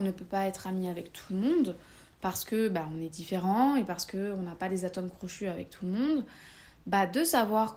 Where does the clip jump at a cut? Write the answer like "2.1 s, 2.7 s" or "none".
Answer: none

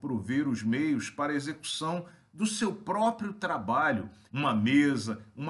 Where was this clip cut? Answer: 4.3 s

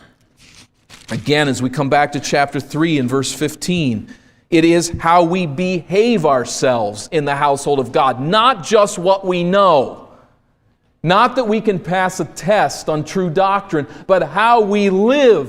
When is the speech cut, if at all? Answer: none

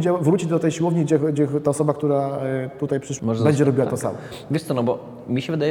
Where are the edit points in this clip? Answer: 1.2 s, 3.2 s

